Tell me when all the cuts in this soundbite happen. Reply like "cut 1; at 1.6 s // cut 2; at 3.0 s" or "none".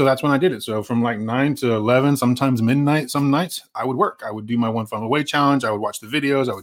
none

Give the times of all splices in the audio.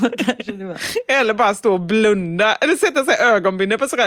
none

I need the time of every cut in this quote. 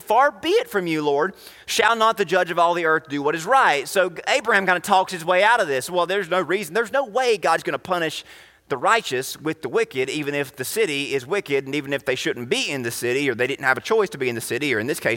none

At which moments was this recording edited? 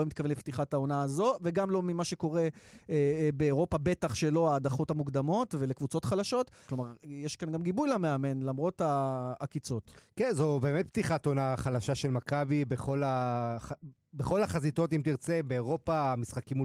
cut 1; at 6.7 s

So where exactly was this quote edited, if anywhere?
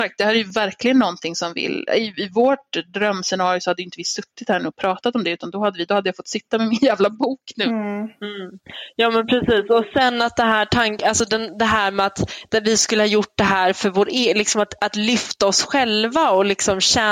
none

